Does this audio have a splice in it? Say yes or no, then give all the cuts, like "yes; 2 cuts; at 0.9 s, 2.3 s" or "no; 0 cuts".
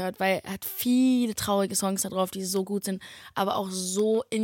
no; 0 cuts